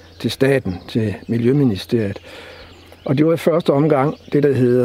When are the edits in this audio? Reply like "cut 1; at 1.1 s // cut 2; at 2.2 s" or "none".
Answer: none

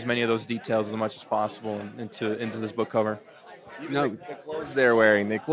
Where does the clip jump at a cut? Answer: none

